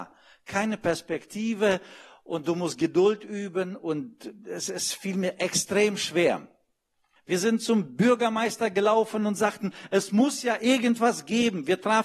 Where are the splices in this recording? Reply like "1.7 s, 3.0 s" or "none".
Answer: 7.2 s